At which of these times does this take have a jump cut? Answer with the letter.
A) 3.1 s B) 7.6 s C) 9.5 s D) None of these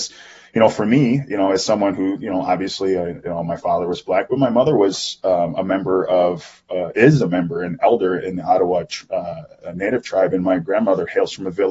D